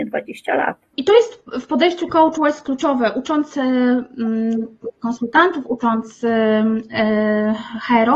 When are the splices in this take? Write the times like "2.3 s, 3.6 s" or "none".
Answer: 0.9 s